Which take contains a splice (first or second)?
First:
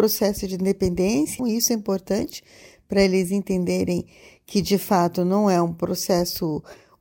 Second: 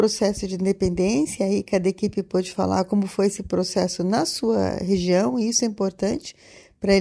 first